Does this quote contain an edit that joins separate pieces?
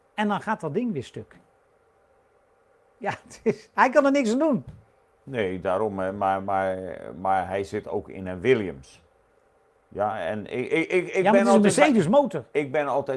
no; 0 cuts

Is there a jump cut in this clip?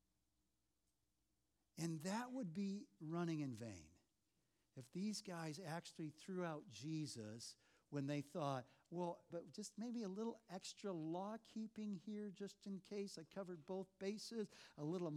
yes; 1 cut; at 9.3 s

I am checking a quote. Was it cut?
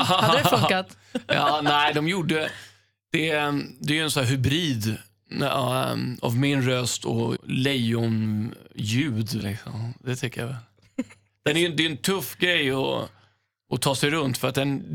yes; 2 cuts; at 7.4 s, 9.4 s

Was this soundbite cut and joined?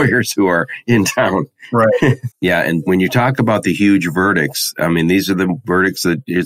yes; 1 cut; at 2.3 s

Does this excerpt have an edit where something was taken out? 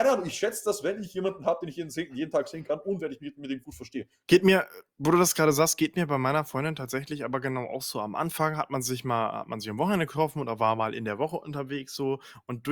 yes; 1 cut; at 4.3 s

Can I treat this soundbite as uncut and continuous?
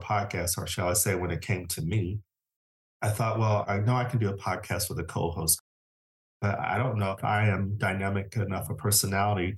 yes; 0 cuts

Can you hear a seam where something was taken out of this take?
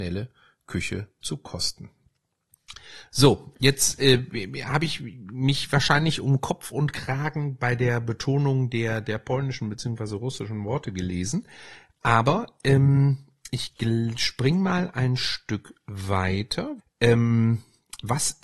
yes; 1 cut; at 16.8 s

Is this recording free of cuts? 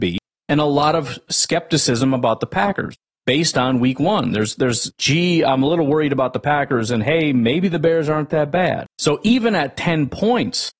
no; 1 cut; at 4.9 s

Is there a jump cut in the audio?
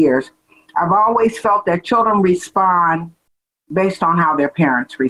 no; 0 cuts

